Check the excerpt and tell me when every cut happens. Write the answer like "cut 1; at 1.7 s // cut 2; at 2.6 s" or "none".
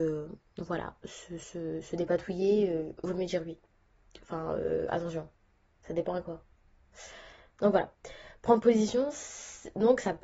none